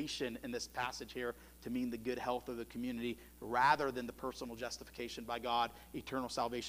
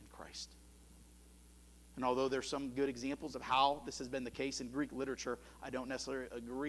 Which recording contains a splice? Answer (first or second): second